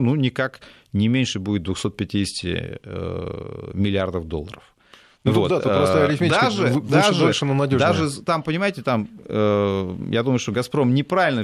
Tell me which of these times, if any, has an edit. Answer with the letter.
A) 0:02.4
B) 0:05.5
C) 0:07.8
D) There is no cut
D